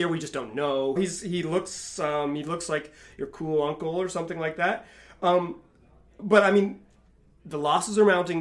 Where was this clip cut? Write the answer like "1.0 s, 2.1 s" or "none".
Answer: 1.0 s